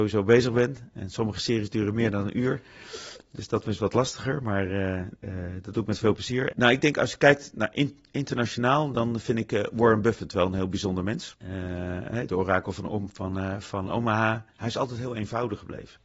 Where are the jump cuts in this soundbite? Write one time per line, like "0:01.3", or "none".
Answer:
0:06.5

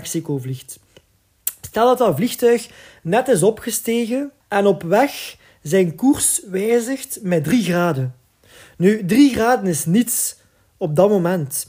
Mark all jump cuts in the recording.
0:04.4

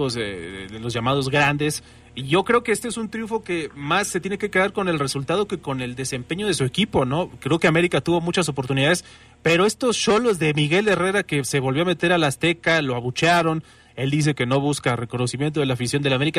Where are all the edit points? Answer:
none

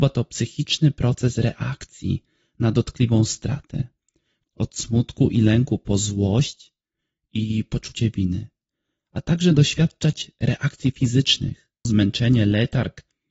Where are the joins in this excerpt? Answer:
0:04.4
0:11.9

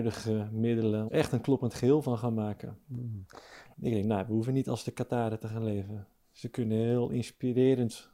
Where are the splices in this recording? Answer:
0:01.1
0:03.7

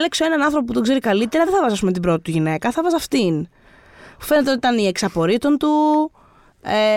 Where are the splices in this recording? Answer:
none

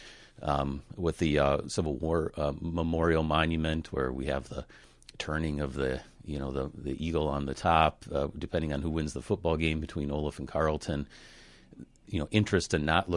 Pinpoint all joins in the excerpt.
none

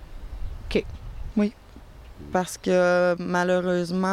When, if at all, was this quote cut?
0:01.3

